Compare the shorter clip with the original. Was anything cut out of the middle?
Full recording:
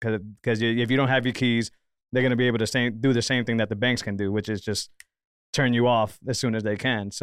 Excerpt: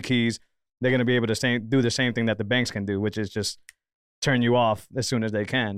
no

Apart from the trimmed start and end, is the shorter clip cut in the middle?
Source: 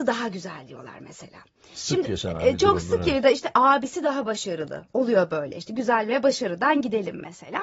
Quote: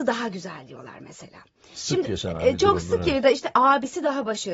no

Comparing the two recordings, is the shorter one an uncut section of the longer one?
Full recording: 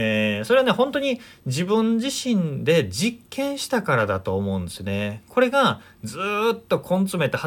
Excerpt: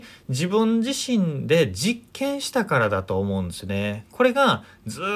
yes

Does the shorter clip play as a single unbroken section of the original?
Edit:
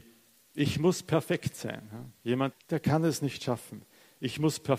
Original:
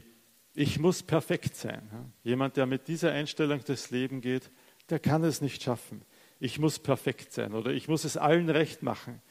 no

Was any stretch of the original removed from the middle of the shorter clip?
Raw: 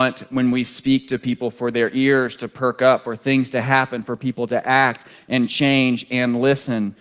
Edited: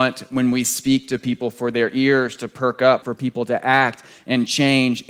yes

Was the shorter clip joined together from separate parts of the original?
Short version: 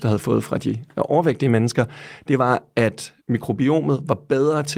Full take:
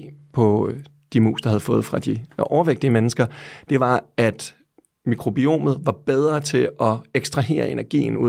yes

